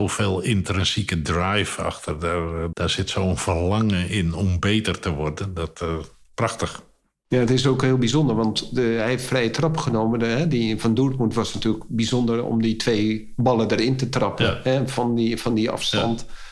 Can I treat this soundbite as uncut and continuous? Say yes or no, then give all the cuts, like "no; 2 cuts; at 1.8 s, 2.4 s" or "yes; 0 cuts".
no; 1 cut; at 2.7 s